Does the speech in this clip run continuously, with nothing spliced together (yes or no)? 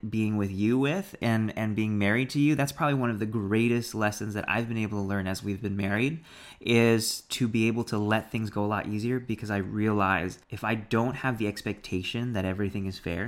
no